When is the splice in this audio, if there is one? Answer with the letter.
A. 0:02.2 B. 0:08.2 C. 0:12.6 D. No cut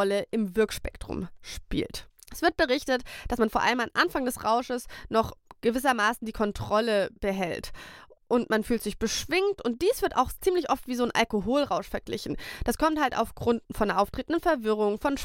D